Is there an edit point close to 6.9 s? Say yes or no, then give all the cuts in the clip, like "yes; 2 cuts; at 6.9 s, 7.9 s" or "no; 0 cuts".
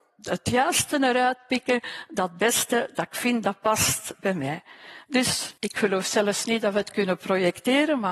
no; 1 cut; at 5.6 s